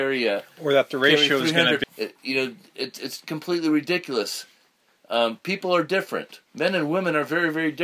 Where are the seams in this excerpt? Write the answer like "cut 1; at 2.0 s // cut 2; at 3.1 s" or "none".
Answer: cut 1; at 1.8 s